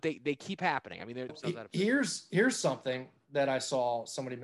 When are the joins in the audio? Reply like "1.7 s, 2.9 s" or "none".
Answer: 1.3 s